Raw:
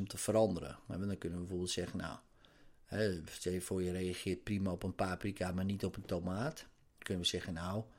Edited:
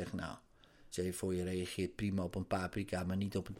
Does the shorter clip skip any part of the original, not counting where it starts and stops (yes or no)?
yes